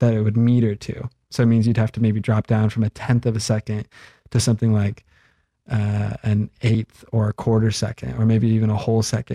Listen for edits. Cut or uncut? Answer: uncut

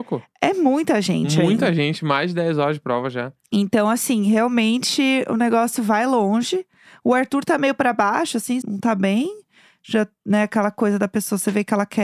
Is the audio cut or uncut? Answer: cut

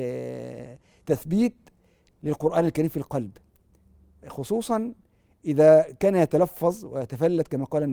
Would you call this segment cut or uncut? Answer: uncut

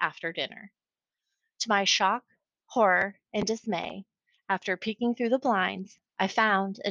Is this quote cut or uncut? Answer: uncut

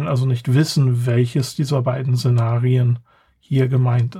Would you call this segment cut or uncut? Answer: uncut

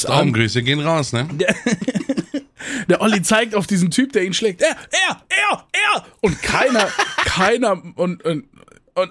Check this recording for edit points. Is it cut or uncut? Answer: uncut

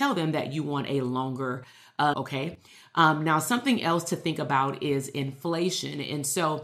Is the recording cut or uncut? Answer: cut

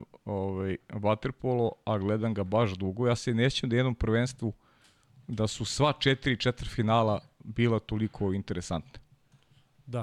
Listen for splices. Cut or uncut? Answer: uncut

